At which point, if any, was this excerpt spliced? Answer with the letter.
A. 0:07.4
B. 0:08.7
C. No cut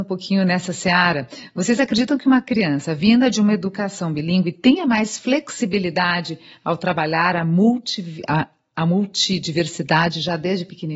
C